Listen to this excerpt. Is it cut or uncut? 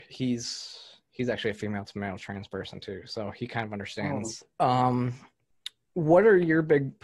cut